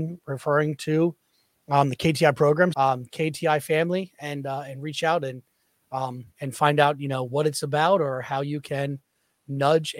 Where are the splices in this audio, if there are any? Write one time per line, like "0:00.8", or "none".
0:02.7